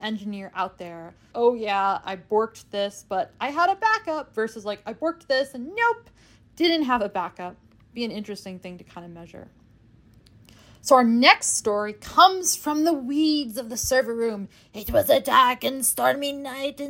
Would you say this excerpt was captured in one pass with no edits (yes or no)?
no